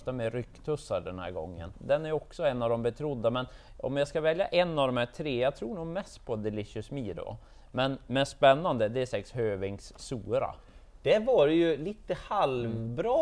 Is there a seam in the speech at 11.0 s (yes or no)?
no